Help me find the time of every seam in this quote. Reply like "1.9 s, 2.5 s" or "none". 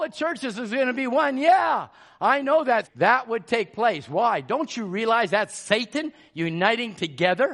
2.8 s